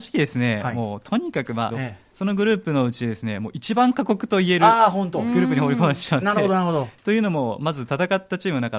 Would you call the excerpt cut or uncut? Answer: cut